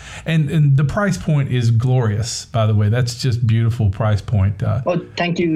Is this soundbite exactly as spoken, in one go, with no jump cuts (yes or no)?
yes